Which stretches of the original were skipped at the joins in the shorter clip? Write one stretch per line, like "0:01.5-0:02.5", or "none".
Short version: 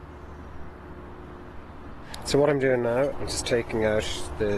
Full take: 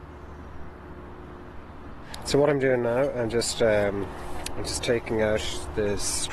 0:03.1-0:04.5